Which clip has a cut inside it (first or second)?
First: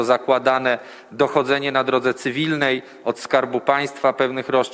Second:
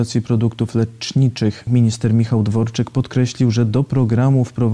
second